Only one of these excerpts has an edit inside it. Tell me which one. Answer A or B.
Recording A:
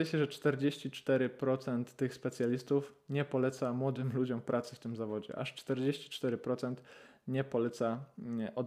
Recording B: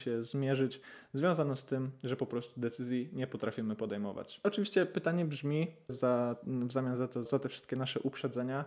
B